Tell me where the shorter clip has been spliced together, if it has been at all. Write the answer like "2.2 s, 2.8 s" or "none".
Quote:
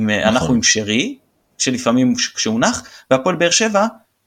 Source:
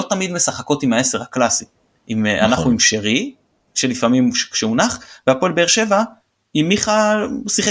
none